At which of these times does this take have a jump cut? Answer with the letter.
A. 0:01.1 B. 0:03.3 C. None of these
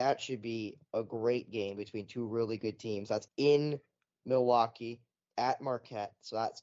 B